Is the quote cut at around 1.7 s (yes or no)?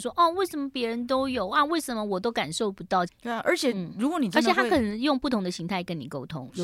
no